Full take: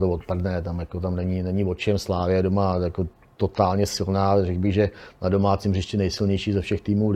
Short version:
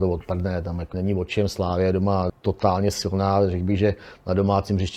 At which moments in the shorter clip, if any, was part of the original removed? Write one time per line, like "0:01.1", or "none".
0:00.9
0:02.3

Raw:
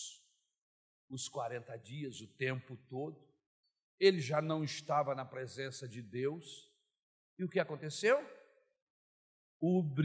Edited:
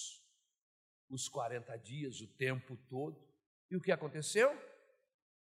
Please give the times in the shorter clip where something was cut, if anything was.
0:03.6

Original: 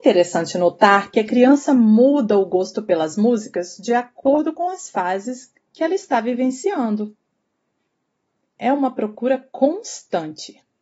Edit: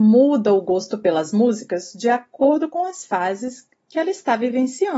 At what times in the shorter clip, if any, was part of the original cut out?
none

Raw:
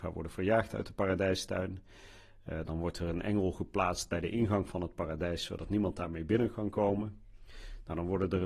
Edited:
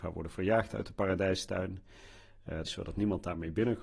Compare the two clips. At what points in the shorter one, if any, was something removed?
0:02.6

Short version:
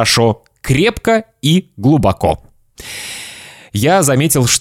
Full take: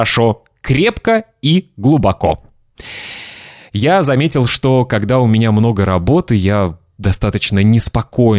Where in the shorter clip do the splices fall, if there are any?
none

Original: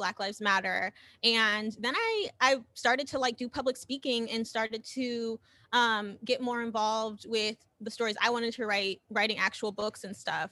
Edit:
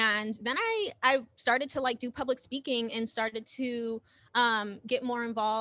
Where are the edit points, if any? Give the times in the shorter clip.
none

